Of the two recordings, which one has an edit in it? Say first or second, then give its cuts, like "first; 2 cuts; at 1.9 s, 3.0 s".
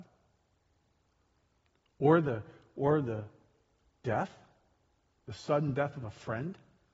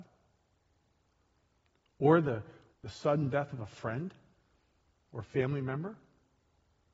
second; 1 cut; at 2.7 s